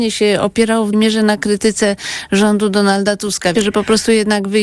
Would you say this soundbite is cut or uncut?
cut